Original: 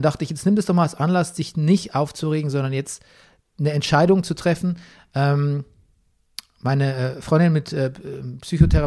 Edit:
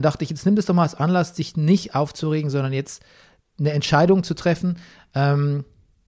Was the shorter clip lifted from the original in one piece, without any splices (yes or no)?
yes